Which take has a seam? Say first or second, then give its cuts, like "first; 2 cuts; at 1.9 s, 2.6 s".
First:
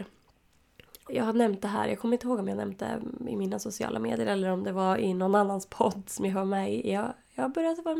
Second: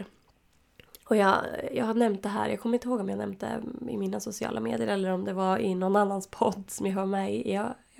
first; 1 cut; at 1.1 s